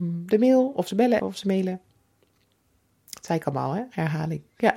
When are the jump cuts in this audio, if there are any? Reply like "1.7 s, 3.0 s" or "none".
1.2 s